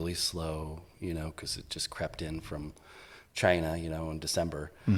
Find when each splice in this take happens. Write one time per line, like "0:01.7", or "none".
none